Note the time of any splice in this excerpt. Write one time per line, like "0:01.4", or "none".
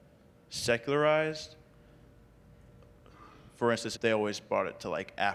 0:04.0